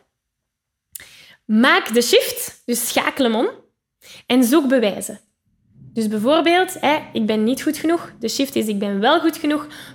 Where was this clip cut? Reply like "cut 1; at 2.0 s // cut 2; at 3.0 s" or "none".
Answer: none